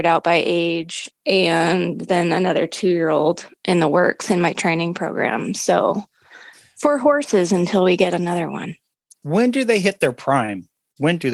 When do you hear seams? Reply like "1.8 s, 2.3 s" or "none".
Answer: 1.1 s